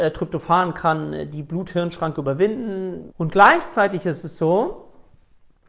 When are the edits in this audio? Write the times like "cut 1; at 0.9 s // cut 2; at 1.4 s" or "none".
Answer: cut 1; at 3.1 s

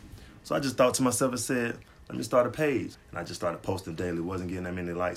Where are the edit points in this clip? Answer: cut 1; at 2.9 s

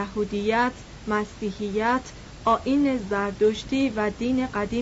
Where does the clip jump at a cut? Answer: none

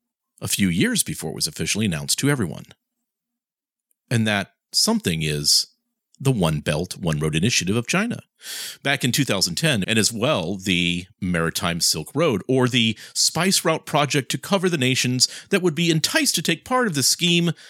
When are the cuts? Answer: cut 1; at 9.8 s

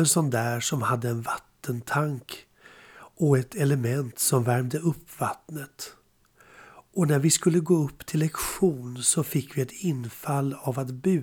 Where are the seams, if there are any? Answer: none

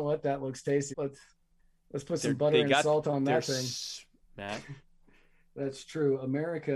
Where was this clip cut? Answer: cut 1; at 0.9 s // cut 2; at 4.3 s

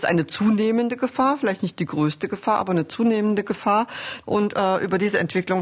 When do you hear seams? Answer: none

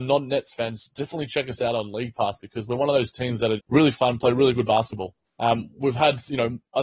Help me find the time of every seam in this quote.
cut 1; at 3.6 s // cut 2; at 5.2 s

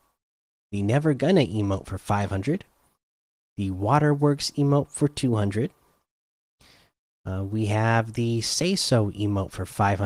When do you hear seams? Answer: none

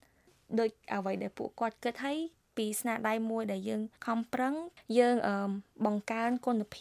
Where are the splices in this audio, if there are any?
cut 1; at 4.0 s

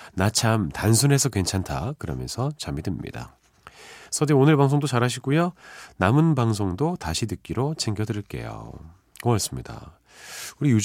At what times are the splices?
none

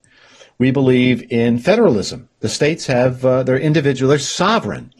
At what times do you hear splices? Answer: none

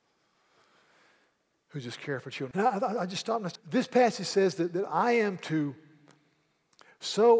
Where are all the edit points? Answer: cut 1; at 2.5 s // cut 2; at 3.6 s

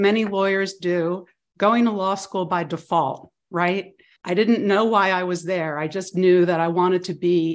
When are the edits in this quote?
none

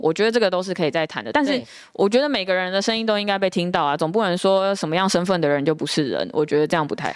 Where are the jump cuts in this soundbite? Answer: none

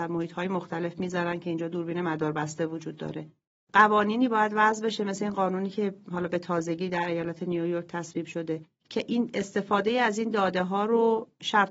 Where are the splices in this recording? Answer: none

